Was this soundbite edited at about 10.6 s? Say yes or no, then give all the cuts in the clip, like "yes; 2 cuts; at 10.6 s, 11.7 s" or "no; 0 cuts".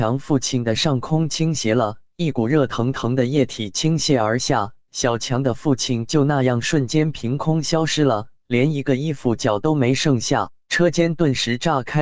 yes; 1 cut; at 10.6 s